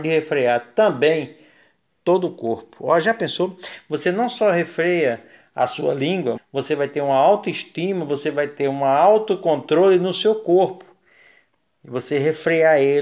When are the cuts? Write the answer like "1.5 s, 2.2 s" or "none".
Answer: 6.4 s